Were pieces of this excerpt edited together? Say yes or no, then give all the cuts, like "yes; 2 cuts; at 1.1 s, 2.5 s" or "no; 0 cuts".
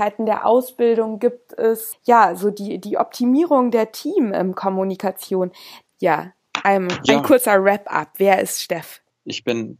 yes; 1 cut; at 5.9 s